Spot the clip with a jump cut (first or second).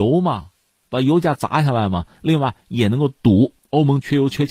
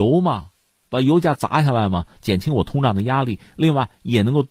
first